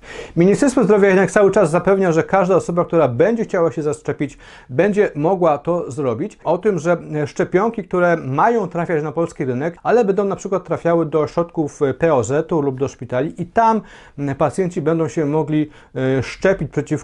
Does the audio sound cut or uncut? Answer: cut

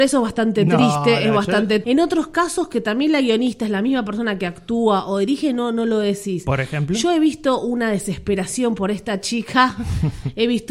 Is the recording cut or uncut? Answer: cut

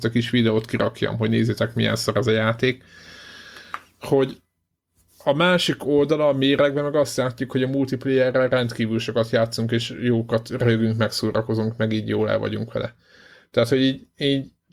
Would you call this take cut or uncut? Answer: uncut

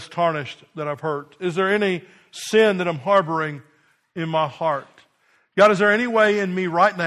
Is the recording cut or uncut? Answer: uncut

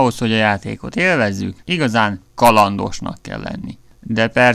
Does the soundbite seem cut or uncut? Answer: cut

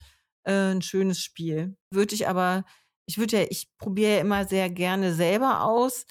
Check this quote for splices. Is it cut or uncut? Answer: cut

